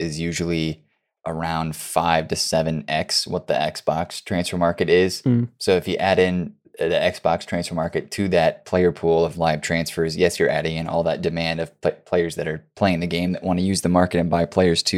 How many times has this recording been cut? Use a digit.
1